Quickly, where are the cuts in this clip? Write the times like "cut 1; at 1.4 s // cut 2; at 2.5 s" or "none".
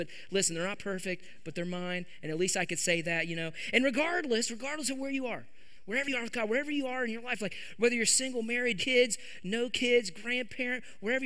cut 1; at 8.8 s